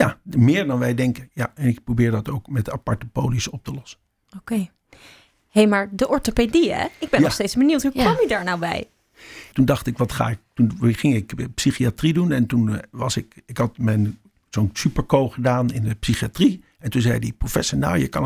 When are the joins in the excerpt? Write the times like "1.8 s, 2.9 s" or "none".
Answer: 9.5 s